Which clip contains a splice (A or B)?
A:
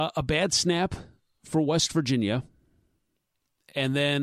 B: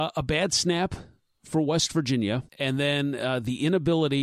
B